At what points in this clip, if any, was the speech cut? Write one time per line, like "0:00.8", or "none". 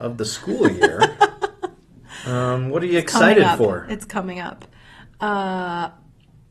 none